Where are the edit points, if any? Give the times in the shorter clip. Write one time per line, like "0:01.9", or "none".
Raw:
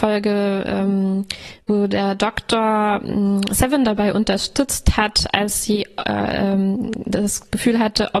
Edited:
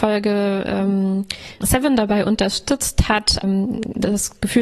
0:01.6
0:03.4